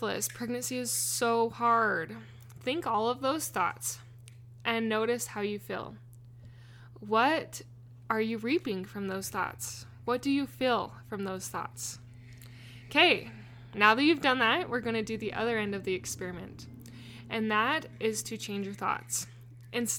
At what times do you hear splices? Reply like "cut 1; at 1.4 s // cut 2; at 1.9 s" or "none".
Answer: none